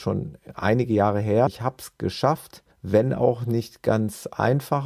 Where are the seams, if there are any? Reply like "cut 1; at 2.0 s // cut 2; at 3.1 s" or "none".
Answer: cut 1; at 1.5 s // cut 2; at 2.7 s